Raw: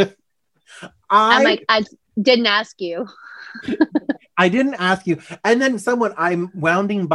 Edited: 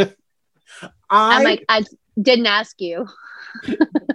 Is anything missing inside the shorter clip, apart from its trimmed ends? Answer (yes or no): no